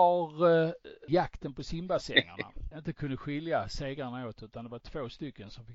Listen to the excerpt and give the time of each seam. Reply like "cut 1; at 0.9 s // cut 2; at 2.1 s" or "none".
cut 1; at 1.1 s // cut 2; at 2.7 s